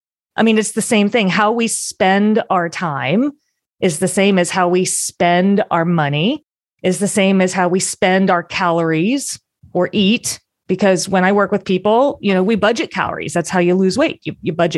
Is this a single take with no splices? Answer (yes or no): yes